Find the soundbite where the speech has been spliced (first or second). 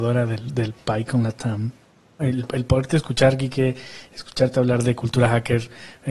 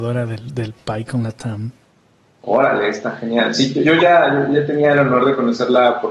first